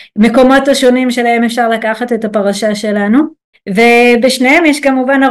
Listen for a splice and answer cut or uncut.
cut